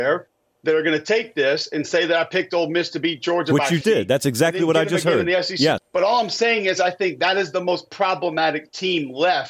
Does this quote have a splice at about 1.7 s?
no; 2 cuts; at 3.8 s, 5.8 s

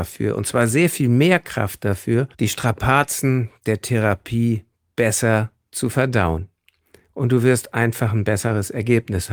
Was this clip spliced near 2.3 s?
yes; 1 cut; at 2.3 s

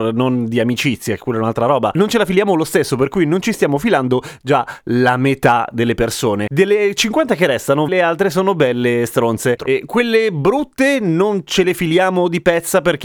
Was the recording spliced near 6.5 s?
no; 2 cuts; at 7.9 s, 9.6 s

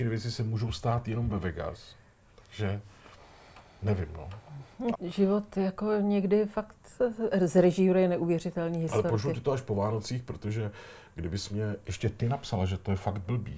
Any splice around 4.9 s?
yes; 1 cut; at 4.9 s

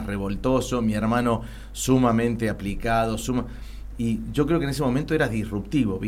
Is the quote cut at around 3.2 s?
yes; 1 cut; at 3.2 s

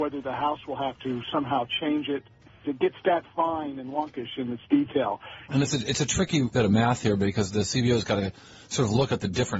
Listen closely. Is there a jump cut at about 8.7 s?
no; 3 cuts; at 2.6 s, 5.5 s, 6.5 s

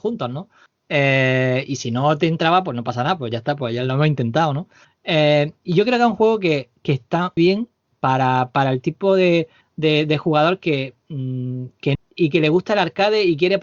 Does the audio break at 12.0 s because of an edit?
yes; 2 cuts; at 7.4 s, 12.0 s

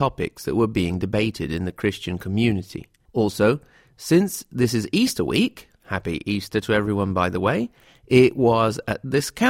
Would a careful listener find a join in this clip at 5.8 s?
no; 1 cut; at 3.1 s

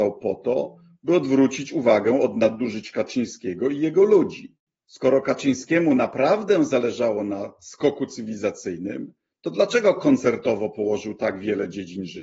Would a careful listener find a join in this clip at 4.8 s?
yes; 1 cut; at 4.8 s

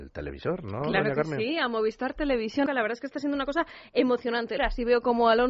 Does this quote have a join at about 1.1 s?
no; 2 cuts; at 2.7 s, 4.6 s

